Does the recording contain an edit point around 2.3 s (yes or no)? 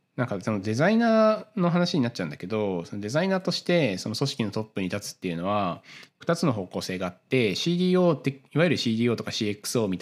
no